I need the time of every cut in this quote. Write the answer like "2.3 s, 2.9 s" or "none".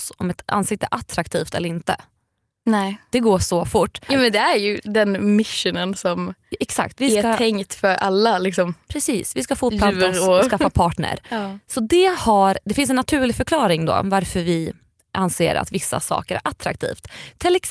4.1 s